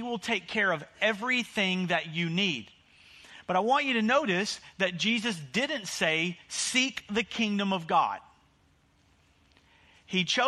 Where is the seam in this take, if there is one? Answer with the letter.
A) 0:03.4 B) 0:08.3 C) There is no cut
C